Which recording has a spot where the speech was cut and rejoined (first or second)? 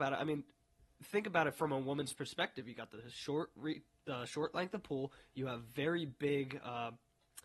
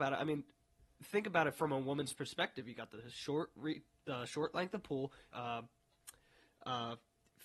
second